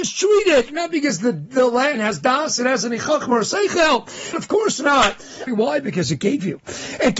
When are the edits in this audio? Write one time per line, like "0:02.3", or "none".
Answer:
0:04.3
0:05.5